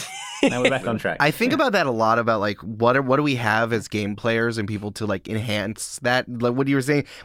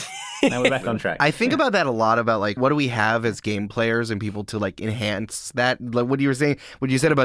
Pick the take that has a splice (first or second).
second